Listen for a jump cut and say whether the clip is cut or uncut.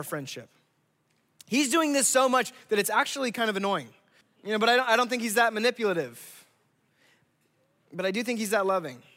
cut